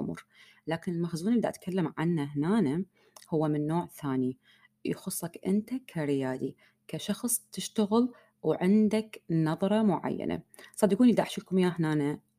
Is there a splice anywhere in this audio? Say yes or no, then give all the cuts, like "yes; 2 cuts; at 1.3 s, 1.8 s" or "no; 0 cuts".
no; 0 cuts